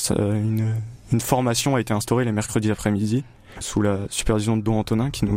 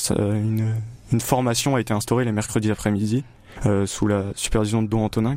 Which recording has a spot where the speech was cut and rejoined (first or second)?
first